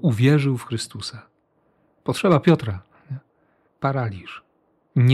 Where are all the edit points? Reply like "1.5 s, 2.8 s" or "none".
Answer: 3.7 s